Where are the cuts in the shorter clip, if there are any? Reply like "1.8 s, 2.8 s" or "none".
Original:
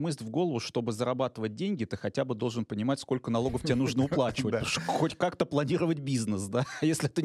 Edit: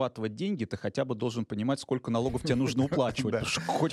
none